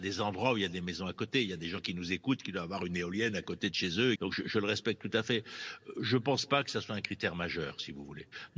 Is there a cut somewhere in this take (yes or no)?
yes